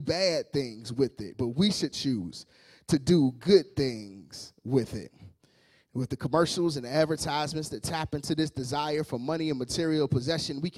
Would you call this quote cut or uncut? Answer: uncut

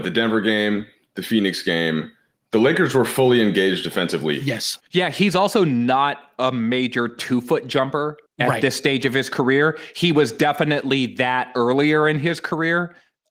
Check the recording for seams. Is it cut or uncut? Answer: cut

